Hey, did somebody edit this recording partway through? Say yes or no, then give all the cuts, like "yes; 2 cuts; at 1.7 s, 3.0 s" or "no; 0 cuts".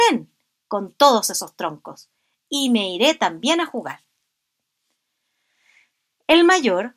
no; 0 cuts